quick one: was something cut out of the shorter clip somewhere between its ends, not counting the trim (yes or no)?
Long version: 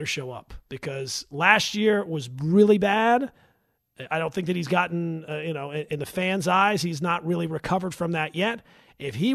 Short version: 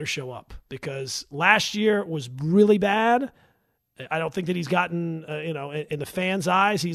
no